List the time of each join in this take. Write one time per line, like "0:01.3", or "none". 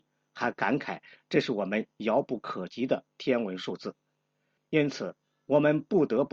0:04.6